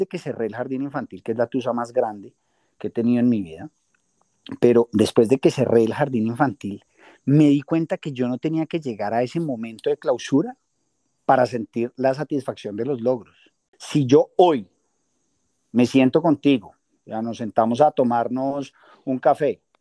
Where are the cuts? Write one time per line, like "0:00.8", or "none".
none